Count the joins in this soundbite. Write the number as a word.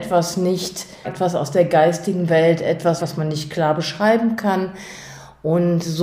two